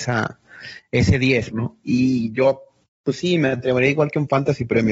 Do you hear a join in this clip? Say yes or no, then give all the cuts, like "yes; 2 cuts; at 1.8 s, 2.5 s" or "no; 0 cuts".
yes; 1 cut; at 1.5 s